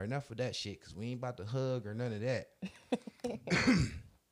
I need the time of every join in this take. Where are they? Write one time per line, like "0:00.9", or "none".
none